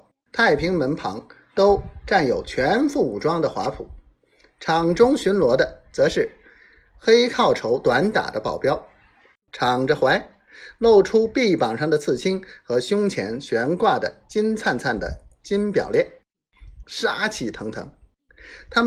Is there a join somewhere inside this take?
yes; 2 cuts; at 9.3 s, 16.8 s

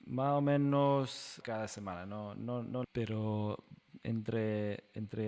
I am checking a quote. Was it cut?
yes; 2 cuts; at 1.4 s, 2.8 s

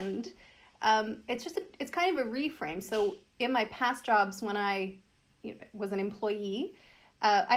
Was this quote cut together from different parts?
no; 0 cuts

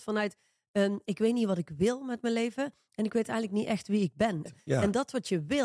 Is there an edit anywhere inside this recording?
yes; 1 cut; at 4.5 s

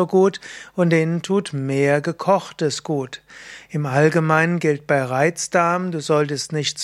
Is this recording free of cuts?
yes; 0 cuts

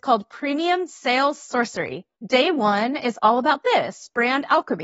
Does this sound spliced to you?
yes; 1 cut; at 2.1 s

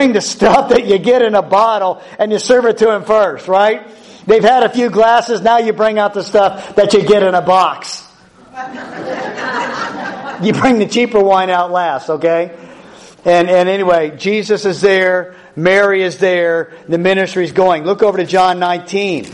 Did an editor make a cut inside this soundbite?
no; 0 cuts

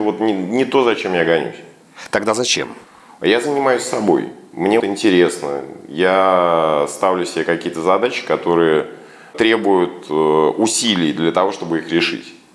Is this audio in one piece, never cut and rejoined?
no; 1 cut; at 4.8 s

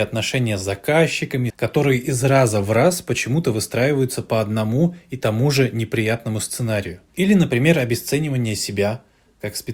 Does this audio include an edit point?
yes; 2 cuts; at 1.5 s, 7.1 s

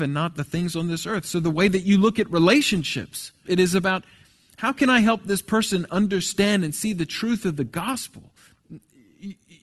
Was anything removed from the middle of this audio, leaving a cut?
yes; 1 cut; at 3.4 s

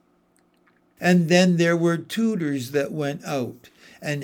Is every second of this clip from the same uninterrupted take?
no; 1 cut; at 1.0 s

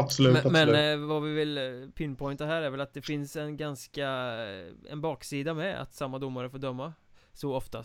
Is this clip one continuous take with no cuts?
yes; 0 cuts

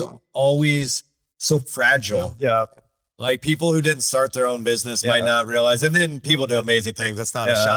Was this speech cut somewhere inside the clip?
no; 0 cuts

